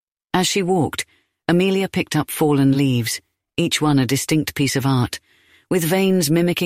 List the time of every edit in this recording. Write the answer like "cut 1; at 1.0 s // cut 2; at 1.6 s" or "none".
none